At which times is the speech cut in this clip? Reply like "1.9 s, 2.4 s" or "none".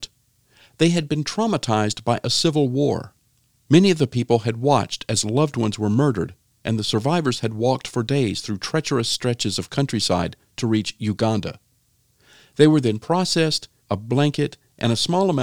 13.8 s